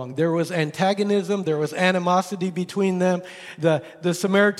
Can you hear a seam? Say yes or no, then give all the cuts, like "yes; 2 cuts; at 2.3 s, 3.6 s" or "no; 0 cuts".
no; 0 cuts